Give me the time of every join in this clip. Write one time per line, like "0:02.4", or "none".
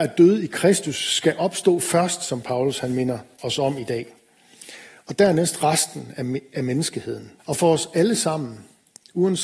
0:07.4